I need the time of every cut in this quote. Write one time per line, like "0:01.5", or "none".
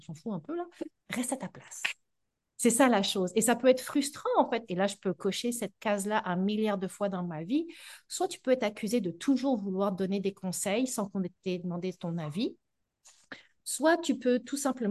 0:01.0
0:04.7